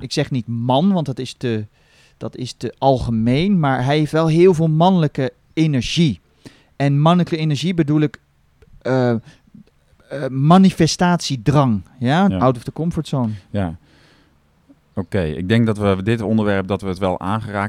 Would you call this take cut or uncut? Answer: cut